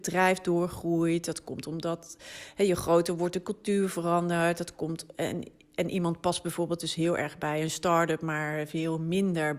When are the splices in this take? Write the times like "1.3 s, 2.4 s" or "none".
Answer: none